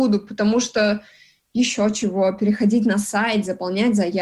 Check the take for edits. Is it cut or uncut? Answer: uncut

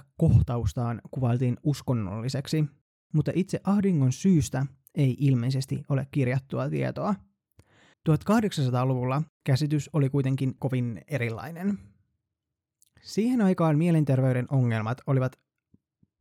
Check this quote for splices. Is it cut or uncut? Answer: cut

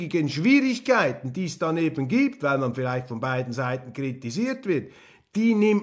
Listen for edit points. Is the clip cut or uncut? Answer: uncut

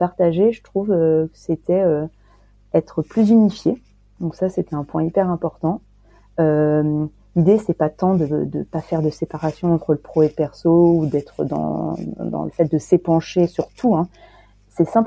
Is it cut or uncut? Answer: uncut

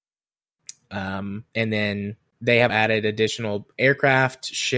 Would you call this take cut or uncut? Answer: cut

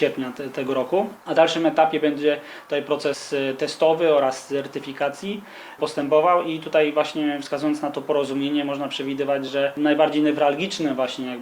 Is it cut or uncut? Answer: uncut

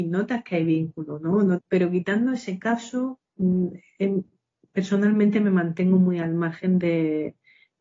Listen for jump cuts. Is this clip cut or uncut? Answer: cut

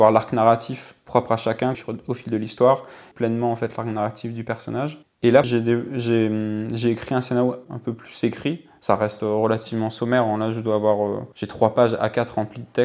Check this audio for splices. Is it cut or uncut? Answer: cut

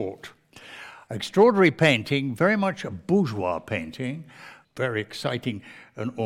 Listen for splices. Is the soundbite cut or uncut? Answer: cut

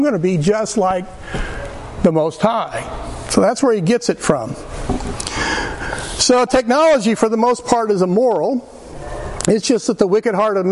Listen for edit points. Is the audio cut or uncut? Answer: uncut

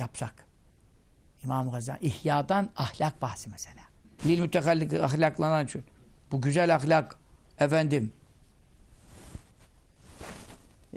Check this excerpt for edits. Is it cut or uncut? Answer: cut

